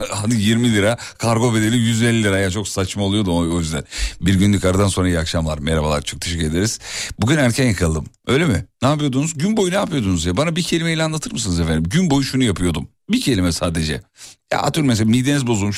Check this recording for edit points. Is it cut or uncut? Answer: uncut